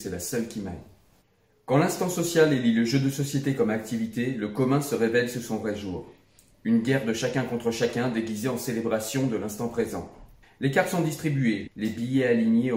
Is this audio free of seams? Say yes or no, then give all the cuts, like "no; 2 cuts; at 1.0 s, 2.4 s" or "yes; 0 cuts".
no; 2 cuts; at 10.4 s, 11.7 s